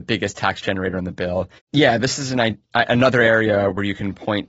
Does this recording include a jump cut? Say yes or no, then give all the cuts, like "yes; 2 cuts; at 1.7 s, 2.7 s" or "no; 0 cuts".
yes; 1 cut; at 1.6 s